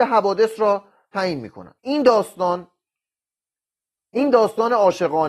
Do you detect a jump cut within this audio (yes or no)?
yes